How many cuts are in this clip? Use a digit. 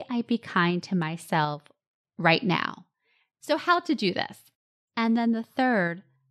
2